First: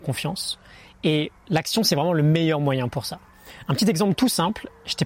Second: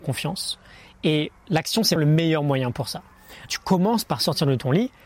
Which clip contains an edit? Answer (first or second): second